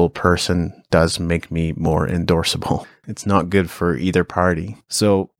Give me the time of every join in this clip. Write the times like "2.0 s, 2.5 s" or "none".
3.0 s

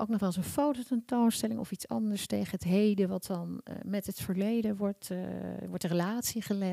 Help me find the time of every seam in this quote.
none

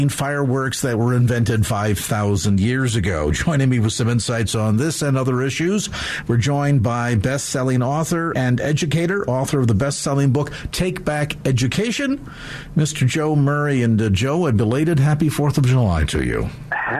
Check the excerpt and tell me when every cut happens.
8.3 s

